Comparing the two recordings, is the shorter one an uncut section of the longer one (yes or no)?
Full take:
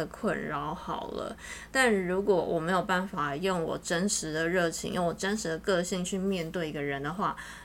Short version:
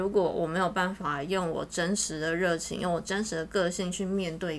yes